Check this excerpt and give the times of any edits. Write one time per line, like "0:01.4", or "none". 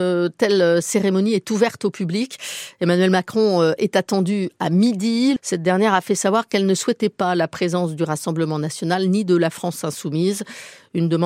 0:05.4